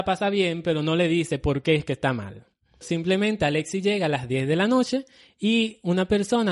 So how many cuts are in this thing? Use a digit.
1